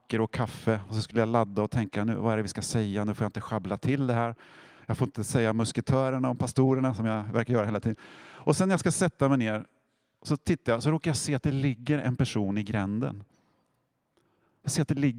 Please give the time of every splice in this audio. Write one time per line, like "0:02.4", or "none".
none